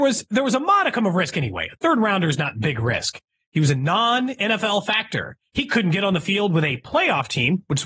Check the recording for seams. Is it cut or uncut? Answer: cut